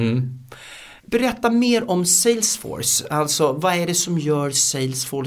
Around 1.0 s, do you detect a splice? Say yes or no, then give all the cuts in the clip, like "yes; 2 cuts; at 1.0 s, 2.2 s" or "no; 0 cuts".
yes; 1 cut; at 1.0 s